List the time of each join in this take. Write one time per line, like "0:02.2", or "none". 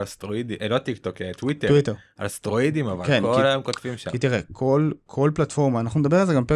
none